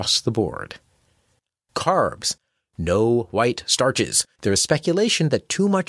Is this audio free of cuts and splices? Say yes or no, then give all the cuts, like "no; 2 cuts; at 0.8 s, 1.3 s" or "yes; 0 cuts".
no; 1 cut; at 4.4 s